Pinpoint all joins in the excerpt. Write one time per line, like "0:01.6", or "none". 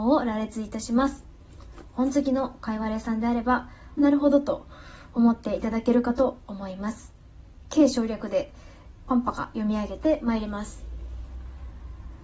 0:04.0